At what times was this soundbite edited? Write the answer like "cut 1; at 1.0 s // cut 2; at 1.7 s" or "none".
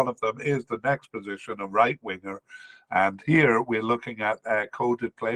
none